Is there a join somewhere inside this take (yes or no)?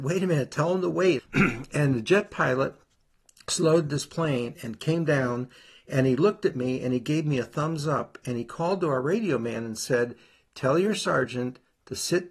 yes